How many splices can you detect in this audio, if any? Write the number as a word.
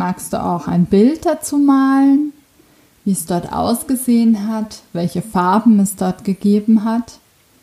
one